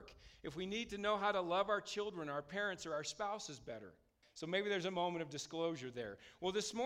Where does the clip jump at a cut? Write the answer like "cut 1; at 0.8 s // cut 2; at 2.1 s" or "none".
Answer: cut 1; at 4.2 s